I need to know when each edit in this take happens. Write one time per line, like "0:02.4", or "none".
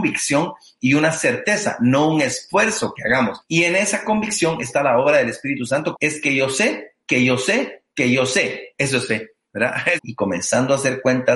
0:03.4
0:05.9
0:10.0